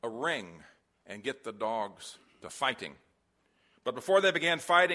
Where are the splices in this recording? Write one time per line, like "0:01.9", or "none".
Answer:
none